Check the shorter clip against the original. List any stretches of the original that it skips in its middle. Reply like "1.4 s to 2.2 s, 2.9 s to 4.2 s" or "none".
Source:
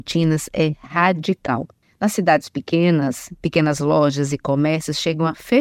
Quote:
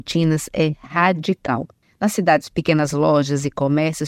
2.5 s to 3.4 s